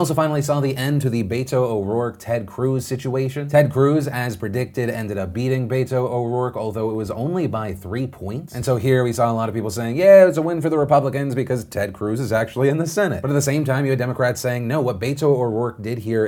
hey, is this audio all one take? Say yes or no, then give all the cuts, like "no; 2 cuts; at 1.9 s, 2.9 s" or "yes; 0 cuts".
yes; 0 cuts